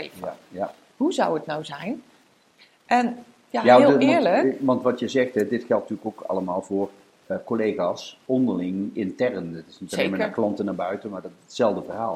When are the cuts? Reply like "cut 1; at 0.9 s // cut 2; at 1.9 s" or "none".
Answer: none